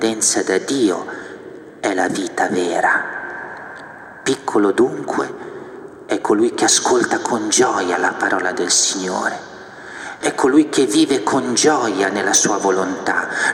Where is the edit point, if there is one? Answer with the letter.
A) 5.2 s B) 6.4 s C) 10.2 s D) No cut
C